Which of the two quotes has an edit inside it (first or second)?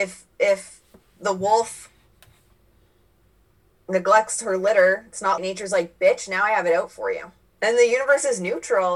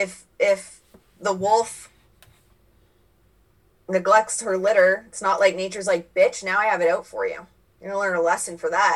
first